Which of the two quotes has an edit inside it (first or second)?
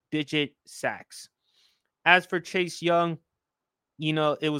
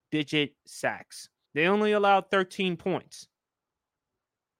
second